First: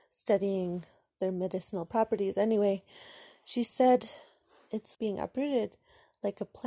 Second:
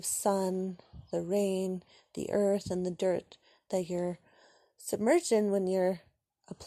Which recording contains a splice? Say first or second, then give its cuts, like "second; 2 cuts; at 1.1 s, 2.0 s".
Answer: first; 1 cut; at 4.9 s